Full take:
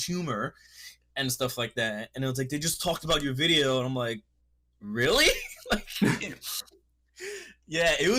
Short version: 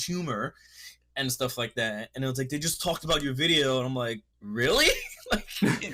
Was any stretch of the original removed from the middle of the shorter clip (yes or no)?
yes